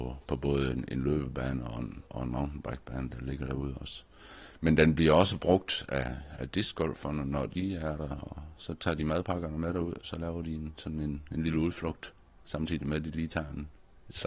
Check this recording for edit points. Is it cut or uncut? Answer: uncut